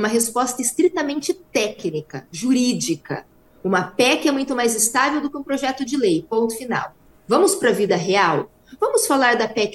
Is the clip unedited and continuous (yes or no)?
yes